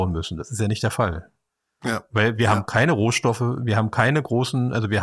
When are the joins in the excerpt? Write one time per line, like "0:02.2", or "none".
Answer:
none

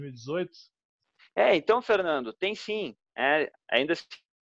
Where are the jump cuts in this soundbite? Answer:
none

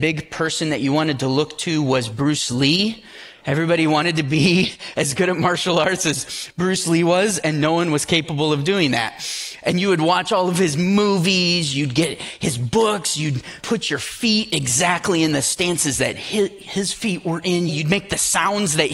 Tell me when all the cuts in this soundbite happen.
0:13.6
0:17.7

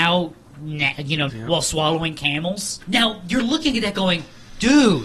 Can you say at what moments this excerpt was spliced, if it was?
0:01.3
0:02.8

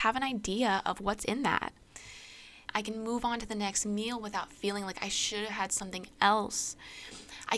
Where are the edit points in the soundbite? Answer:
0:02.7

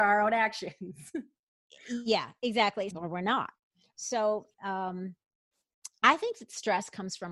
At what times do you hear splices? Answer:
0:02.9
0:04.5

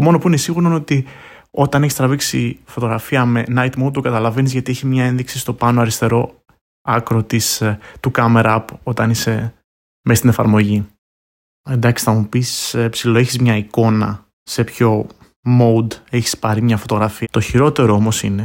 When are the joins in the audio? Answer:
0:17.2

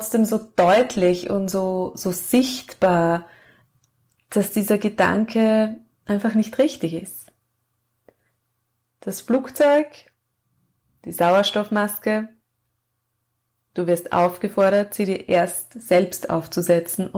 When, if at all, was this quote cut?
none

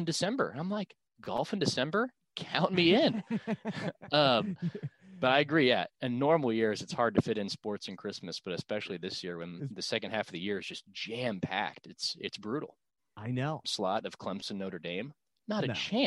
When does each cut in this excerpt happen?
0:05.9
0:13.6

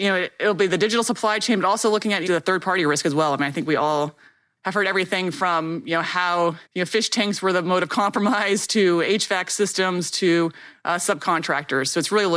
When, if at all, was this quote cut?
0:02.3
0:06.7

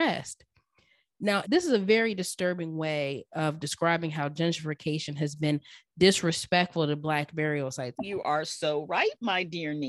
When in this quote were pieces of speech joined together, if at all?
0:01.4
0:07.9

